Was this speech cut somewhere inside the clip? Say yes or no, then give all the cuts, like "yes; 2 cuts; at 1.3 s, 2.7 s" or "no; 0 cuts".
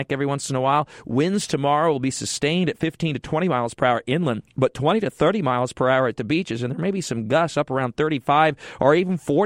no; 0 cuts